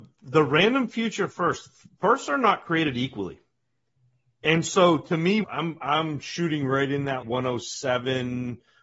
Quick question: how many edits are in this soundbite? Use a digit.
2